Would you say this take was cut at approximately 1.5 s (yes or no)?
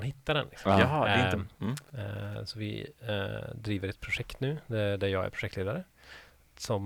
yes